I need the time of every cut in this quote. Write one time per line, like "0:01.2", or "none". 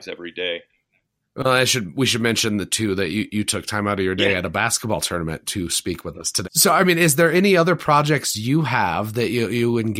0:06.4

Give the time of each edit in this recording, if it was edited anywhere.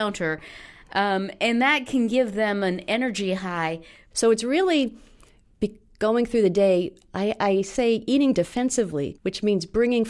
0:04.1
0:09.1

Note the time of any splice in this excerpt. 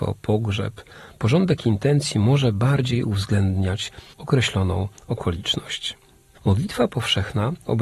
0:06.3

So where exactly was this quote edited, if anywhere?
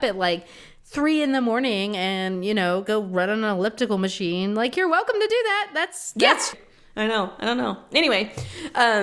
0:06.5

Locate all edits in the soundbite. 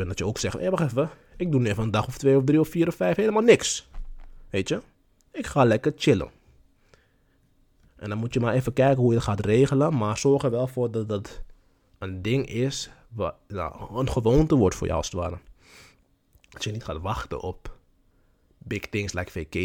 none

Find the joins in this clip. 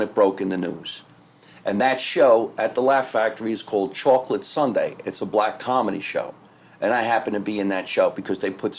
none

